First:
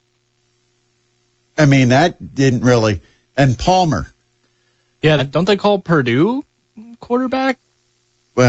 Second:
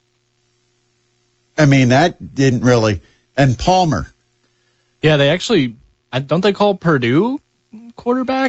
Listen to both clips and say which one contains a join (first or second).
first